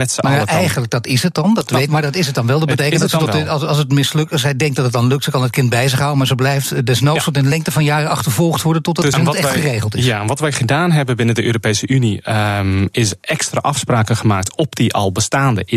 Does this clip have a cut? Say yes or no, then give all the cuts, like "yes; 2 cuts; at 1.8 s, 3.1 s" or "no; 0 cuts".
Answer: yes; 2 cuts; at 1.9 s, 9.1 s